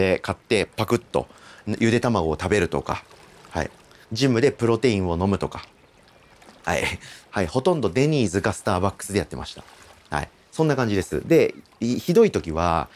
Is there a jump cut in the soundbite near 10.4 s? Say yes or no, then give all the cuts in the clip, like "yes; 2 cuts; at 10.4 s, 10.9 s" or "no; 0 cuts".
no; 1 cut; at 7.2 s